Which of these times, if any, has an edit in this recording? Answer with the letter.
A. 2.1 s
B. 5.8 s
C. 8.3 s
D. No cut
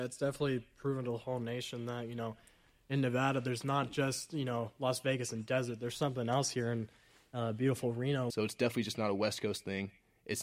C